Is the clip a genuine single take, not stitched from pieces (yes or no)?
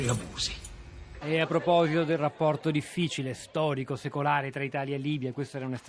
no